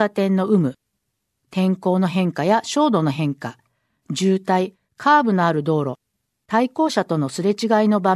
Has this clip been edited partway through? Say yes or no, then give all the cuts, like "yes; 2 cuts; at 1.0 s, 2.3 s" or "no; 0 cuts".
no; 0 cuts